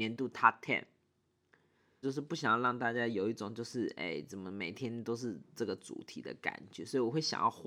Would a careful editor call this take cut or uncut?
cut